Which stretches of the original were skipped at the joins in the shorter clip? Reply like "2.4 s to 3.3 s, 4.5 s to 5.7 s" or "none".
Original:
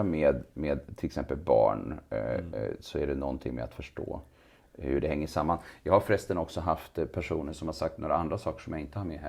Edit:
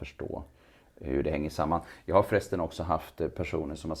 none